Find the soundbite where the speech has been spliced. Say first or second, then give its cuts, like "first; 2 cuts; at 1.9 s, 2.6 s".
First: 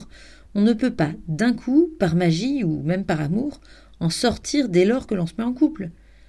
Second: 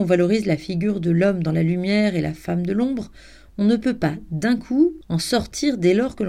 second; 1 cut; at 5.0 s